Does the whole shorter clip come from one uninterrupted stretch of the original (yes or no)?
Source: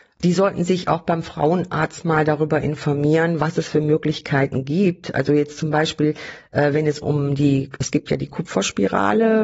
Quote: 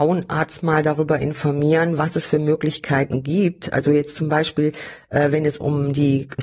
yes